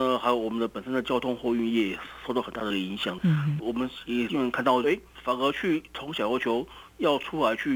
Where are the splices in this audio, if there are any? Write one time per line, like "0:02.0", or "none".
0:03.6
0:04.8